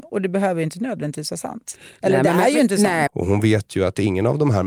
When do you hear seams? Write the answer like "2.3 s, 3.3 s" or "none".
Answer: 3.1 s